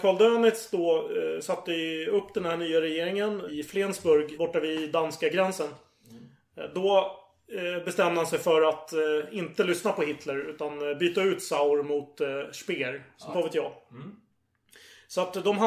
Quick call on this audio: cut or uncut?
cut